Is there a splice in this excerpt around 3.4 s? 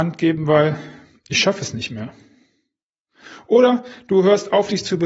no; 0 cuts

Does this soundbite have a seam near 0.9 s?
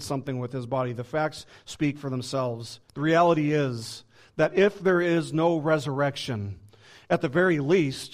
no; 1 cut; at 2.9 s

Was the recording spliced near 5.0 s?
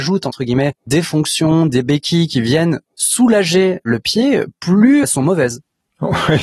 yes; 1 cut; at 5.0 s

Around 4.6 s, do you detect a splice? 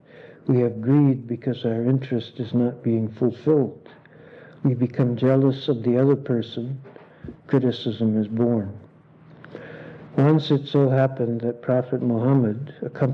no; 2 cuts; at 7.3 s, 10.1 s

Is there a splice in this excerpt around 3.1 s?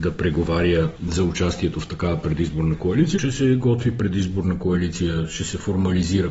yes; 1 cut; at 3.1 s

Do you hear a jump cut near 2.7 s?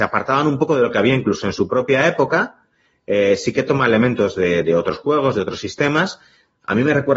no; 0 cuts

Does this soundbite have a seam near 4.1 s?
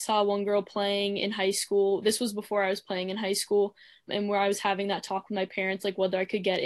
yes; 1 cut; at 4.1 s

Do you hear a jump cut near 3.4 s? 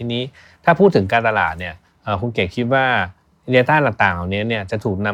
no; 0 cuts

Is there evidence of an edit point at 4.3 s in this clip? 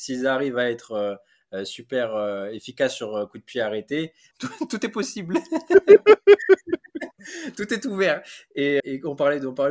yes; 2 cuts; at 4.3 s, 8.8 s

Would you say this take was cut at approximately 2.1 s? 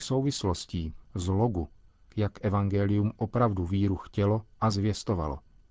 yes; 1 cut; at 2.1 s

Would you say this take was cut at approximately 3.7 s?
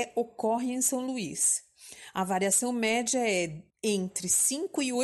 yes; 1 cut; at 3.7 s

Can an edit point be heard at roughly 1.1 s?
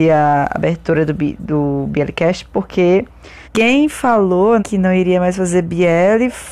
no; 2 cuts; at 3.4 s, 4.6 s

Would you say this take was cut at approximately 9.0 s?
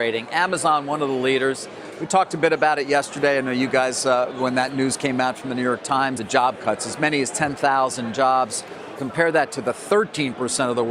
yes; 2 cuts; at 6.2 s, 9.0 s

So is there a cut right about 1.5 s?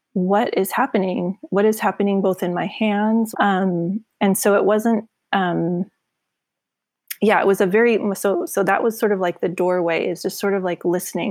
no; 1 cut; at 3.3 s

